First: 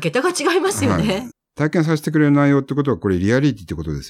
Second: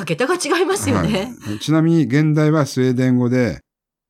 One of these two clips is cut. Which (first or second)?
first